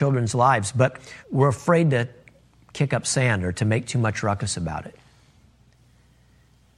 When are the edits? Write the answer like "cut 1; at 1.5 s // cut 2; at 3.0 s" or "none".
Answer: cut 1; at 1.2 s